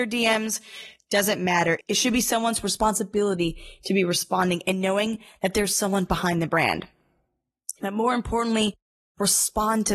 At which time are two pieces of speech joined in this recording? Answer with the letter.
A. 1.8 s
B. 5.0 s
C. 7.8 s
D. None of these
C